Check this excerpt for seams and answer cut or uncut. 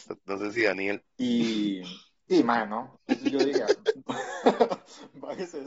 cut